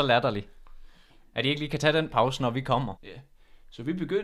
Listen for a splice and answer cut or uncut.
cut